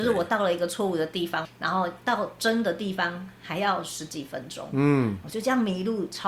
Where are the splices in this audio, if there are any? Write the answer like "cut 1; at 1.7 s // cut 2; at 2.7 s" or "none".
cut 1; at 1.4 s